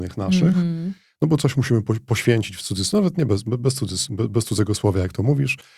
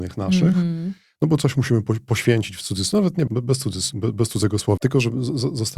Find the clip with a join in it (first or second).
second